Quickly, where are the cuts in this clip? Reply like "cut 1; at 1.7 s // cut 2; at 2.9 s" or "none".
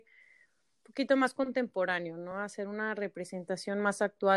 none